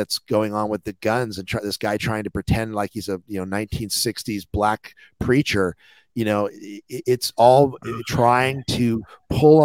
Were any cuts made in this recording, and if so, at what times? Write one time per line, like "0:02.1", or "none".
none